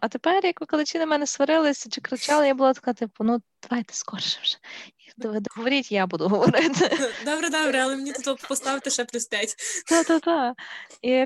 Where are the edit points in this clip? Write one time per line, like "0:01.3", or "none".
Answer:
none